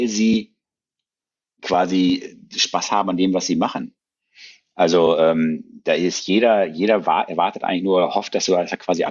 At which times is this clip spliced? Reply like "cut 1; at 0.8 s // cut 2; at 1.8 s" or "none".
none